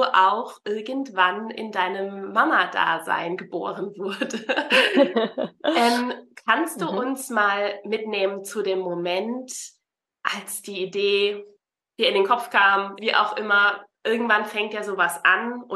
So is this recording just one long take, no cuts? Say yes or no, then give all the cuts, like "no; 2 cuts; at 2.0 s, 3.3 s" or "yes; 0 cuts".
no; 1 cut; at 13.0 s